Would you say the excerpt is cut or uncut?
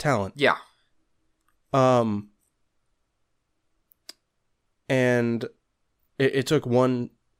uncut